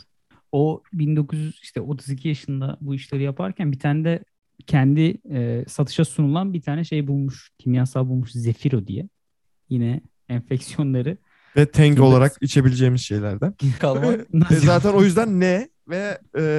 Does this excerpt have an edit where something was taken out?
yes; 1 cut; at 13.8 s

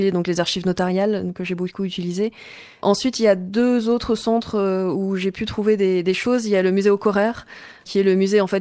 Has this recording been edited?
no; 0 cuts

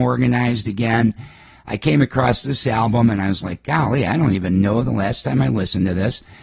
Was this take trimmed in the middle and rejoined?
no; 0 cuts

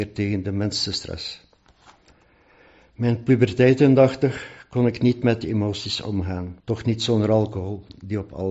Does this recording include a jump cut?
yes; 1 cut; at 6.6 s

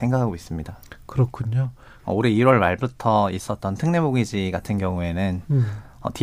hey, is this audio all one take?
no; 1 cut; at 2.0 s

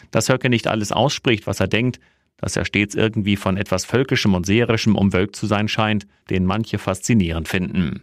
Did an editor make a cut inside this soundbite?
yes; 1 cut; at 6.2 s

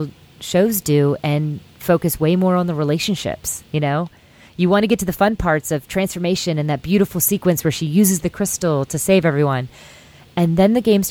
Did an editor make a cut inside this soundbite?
no; 0 cuts

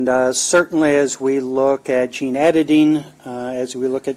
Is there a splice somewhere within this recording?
no; 0 cuts

